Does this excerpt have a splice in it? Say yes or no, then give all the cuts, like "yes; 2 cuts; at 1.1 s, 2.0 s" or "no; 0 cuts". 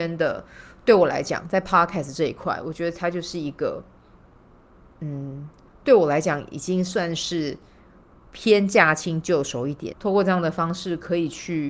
yes; 1 cut; at 9.9 s